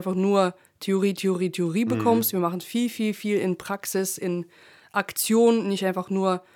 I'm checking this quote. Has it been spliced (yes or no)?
no